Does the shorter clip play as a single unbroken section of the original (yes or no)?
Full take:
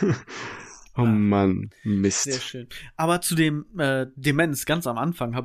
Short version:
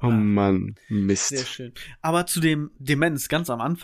no